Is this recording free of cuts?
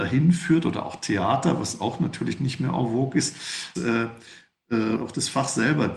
no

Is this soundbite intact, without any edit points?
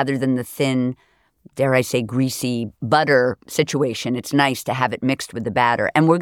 yes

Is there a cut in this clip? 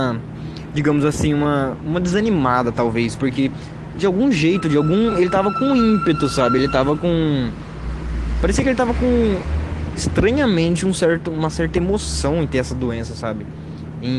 no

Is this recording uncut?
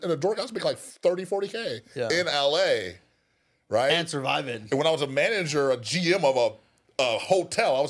yes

